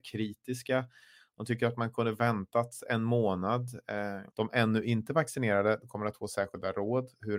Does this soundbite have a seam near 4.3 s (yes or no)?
yes